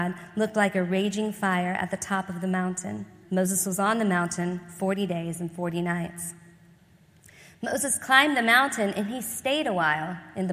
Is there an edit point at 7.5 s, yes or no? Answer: no